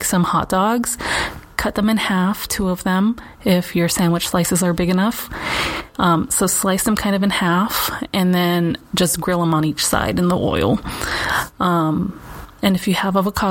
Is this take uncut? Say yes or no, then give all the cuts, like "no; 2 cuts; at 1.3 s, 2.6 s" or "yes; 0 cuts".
yes; 0 cuts